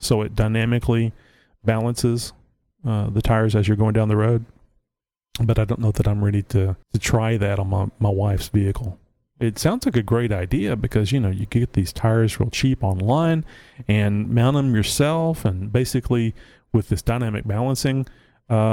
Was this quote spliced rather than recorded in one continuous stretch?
yes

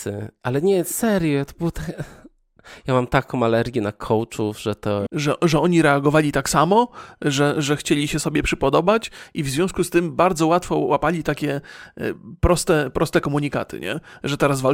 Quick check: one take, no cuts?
no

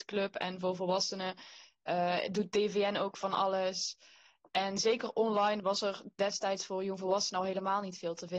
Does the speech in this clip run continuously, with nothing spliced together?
yes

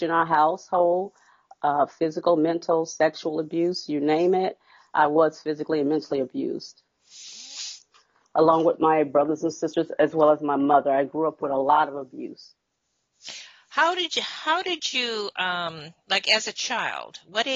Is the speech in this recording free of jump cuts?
no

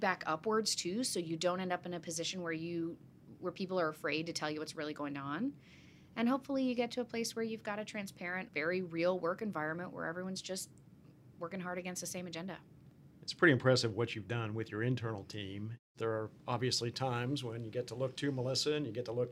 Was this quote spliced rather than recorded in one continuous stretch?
yes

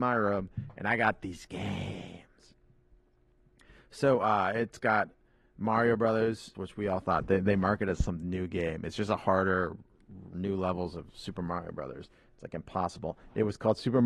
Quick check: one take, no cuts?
no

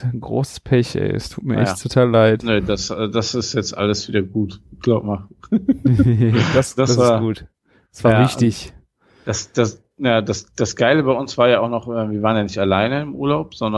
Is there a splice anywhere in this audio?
no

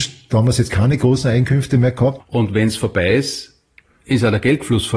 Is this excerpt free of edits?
no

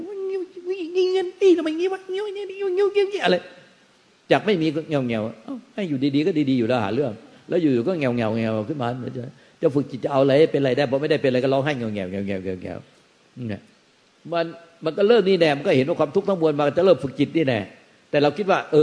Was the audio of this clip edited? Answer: no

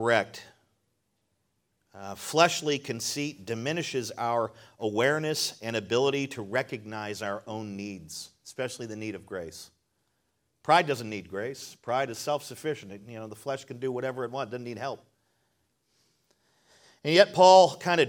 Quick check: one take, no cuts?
yes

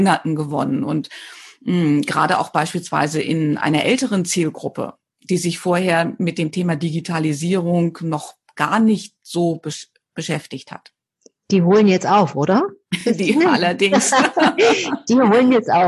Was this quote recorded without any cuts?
yes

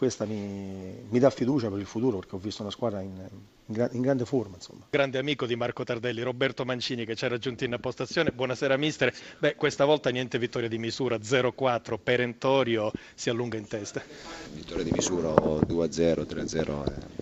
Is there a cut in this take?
no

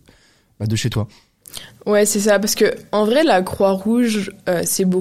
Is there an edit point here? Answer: no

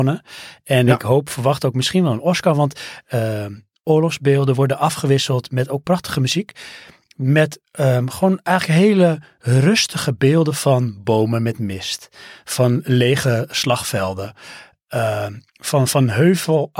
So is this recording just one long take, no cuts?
yes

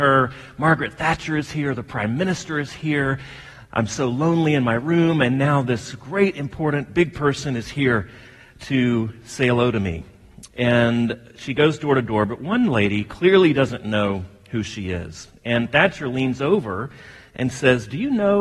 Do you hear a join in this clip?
no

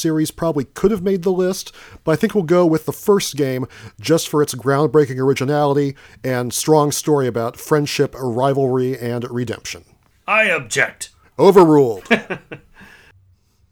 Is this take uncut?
yes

